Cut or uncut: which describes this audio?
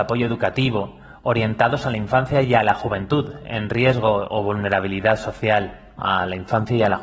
cut